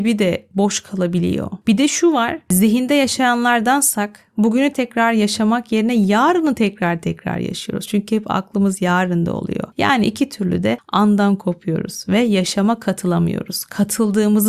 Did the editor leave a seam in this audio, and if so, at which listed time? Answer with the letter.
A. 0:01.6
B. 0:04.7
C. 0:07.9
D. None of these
B